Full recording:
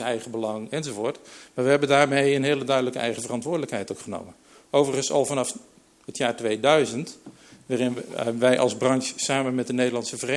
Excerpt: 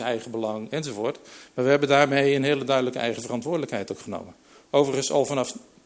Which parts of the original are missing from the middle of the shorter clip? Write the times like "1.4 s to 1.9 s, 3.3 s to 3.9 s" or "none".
none